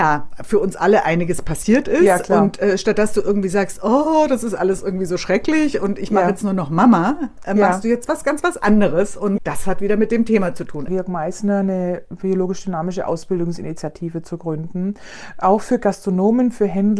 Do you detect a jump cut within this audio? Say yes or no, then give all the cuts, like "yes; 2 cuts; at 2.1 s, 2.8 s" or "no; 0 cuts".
yes; 2 cuts; at 9.4 s, 10.9 s